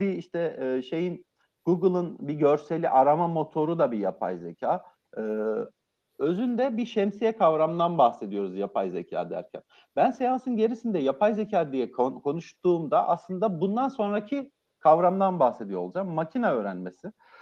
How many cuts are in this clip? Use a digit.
0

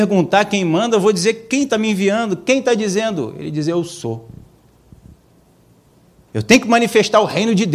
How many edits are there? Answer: 1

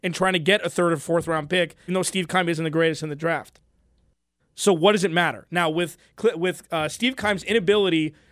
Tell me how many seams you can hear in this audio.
2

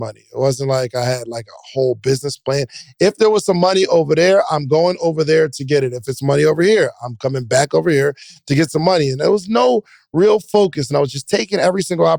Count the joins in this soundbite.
0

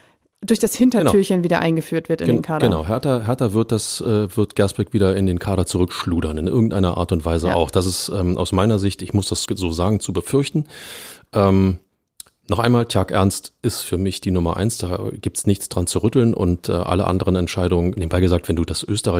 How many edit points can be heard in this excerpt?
2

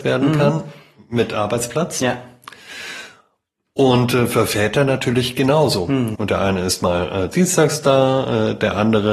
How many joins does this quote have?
2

